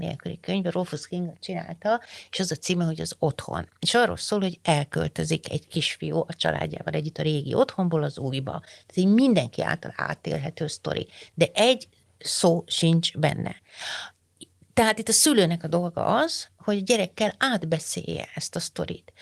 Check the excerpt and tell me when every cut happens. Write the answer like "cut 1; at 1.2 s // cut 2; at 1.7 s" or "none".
none